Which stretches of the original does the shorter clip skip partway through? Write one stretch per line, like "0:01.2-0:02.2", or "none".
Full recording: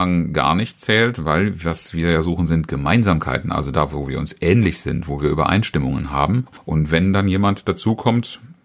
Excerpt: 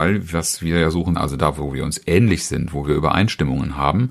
0:02.5-0:03.5